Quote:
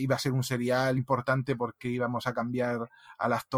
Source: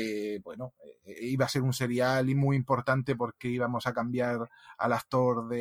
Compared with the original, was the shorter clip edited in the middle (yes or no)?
yes